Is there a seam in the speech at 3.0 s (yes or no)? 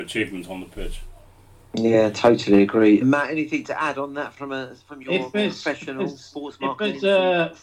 yes